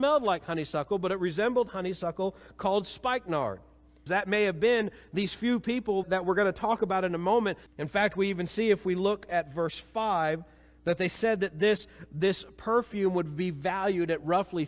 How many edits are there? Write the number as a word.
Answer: three